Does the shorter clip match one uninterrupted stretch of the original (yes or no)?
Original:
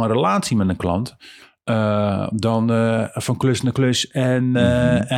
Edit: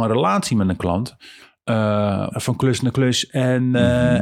no